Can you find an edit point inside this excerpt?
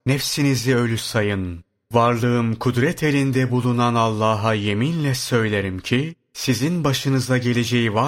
no; 0 cuts

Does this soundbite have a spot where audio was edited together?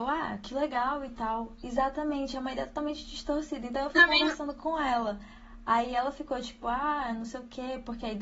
yes; 1 cut; at 1.6 s

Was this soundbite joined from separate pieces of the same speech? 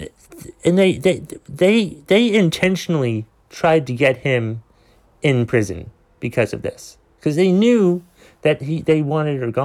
no; 0 cuts

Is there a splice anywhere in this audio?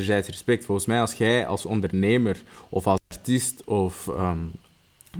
no; 0 cuts

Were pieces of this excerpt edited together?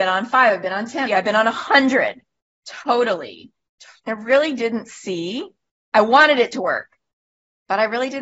yes; 3 cuts; at 1.1 s, 2.6 s, 4.0 s

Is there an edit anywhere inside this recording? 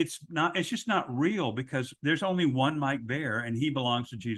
no; 0 cuts

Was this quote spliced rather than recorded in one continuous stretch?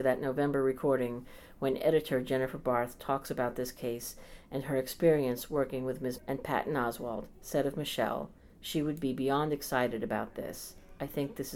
yes; 1 cut; at 6.2 s

